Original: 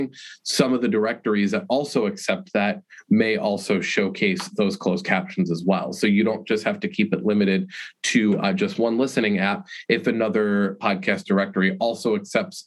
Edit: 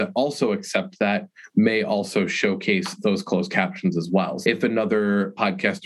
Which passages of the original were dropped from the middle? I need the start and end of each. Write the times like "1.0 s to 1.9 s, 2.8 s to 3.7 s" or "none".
6.0 s to 9.9 s

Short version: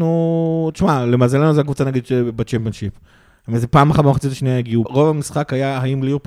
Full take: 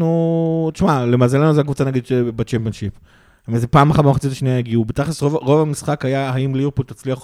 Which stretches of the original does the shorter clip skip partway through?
4.9 s to 5.4 s

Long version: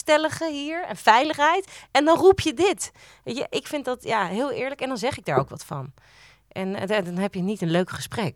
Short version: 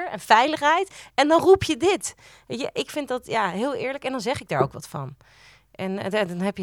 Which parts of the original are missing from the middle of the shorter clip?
none

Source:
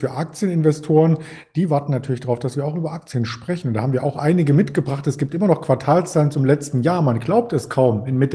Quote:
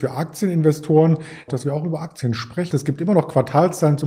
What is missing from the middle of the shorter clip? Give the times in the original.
1.5 s to 2.4 s, 3.6 s to 5.0 s

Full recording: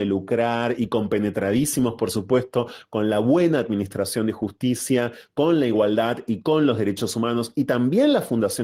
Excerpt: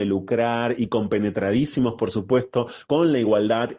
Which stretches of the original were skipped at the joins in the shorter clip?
2.9 s to 5.3 s

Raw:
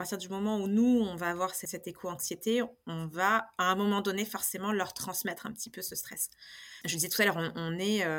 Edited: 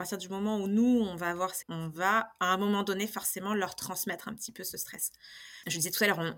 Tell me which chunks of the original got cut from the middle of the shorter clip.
1.6 s to 2.8 s

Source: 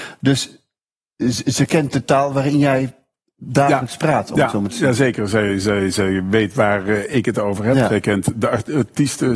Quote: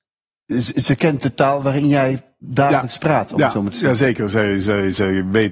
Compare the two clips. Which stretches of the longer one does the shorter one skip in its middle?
3.1 s to 3.4 s

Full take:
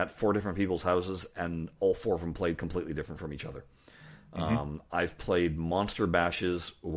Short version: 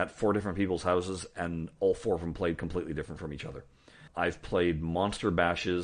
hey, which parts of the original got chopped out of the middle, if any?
4.1 s to 4.8 s

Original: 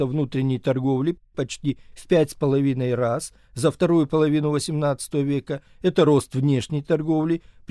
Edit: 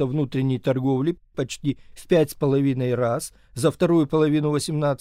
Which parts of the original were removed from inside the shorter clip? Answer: none

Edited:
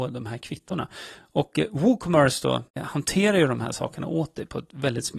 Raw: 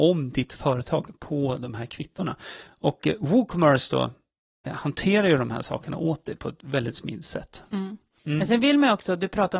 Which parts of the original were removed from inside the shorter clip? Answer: 4.2 s to 4.6 s

